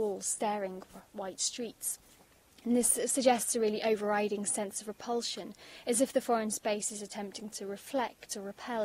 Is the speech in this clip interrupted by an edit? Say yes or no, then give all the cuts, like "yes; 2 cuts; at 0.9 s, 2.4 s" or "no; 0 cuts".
no; 0 cuts